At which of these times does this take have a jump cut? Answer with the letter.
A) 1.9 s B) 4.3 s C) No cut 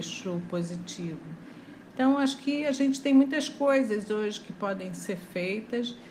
C